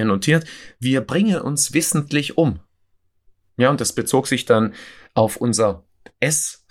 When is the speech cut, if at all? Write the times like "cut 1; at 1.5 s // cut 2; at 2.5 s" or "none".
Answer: none